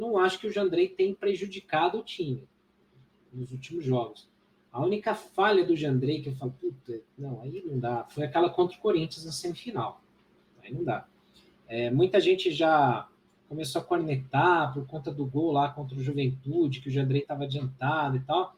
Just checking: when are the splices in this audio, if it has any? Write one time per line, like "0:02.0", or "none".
none